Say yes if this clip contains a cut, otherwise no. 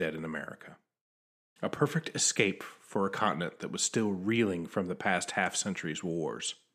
yes